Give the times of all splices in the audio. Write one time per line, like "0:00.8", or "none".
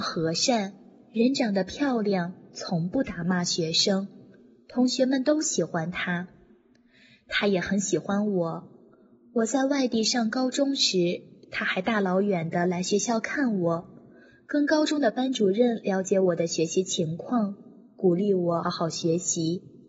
0:18.6

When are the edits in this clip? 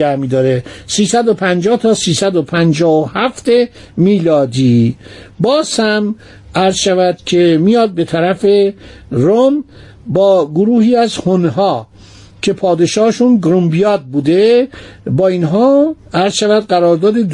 none

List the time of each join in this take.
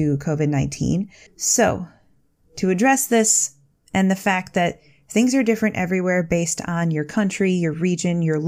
0:01.3

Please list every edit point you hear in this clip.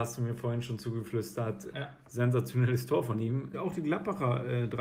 0:01.7
0:03.5

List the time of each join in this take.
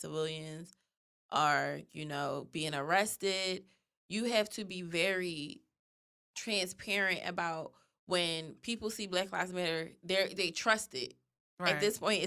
none

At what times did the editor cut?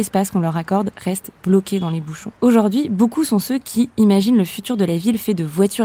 0:02.4

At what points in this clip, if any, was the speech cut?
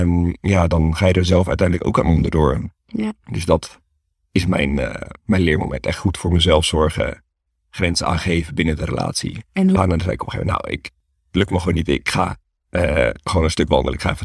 0:09.8

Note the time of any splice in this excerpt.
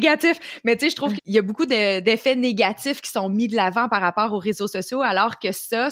0:01.2

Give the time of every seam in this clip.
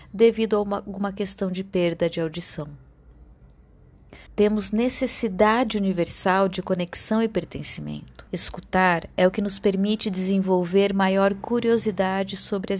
0:04.3
0:08.3

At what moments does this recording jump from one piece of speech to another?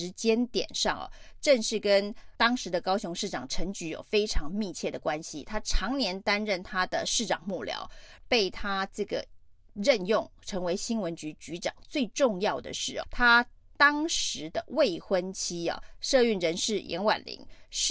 0:02.4
0:08.2
0:13.0

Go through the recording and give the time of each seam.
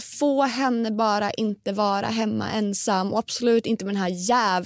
none

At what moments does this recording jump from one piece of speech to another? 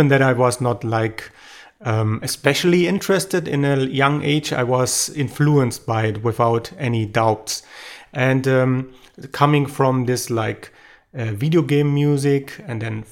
0:08.1

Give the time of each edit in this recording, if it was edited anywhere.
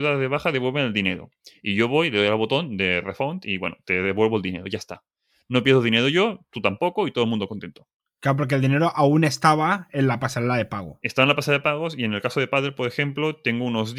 none

